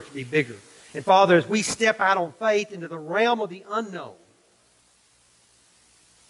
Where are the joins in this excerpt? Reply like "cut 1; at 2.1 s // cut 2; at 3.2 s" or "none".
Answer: none